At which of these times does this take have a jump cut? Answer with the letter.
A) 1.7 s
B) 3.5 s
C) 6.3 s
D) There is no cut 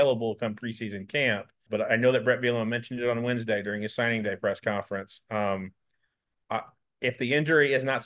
A